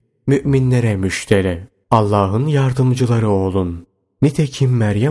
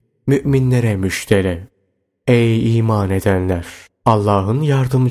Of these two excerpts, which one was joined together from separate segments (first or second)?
first